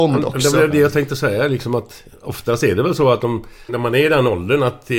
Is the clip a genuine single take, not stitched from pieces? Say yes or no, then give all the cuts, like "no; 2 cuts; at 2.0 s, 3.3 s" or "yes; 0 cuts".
no; 1 cut; at 3.7 s